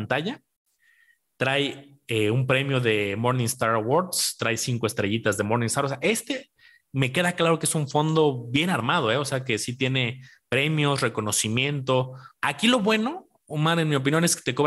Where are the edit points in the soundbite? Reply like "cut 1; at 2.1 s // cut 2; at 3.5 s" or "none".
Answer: cut 1; at 12.3 s